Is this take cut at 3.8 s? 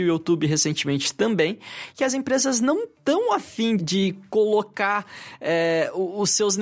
yes; 1 cut; at 3.8 s

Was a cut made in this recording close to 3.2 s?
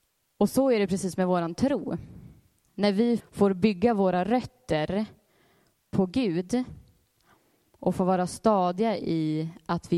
yes; 1 cut; at 3.2 s

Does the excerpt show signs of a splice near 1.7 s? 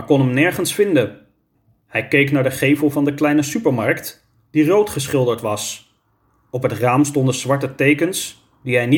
no; 0 cuts

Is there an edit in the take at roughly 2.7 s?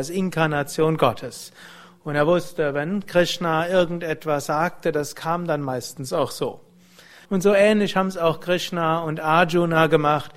no; 1 cut; at 7.3 s

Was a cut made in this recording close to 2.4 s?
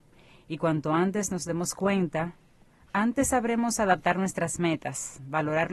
no; 0 cuts

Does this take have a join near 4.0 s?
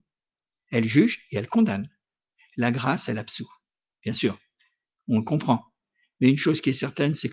yes; 1 cut; at 4.0 s

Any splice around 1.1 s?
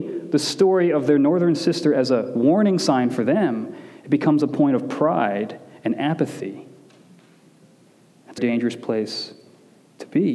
no; 1 cut; at 8.4 s

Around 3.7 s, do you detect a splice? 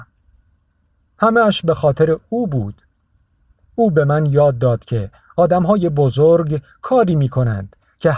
yes; 1 cut; at 3.7 s

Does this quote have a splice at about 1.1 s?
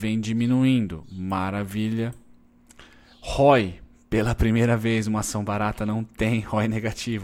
no; 0 cuts

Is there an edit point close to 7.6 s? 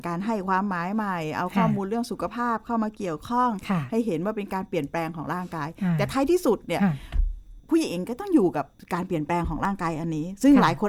yes; 1 cut; at 7.6 s

